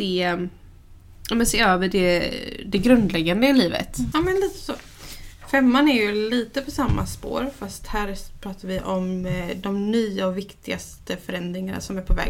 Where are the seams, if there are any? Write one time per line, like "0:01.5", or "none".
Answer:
0:04.1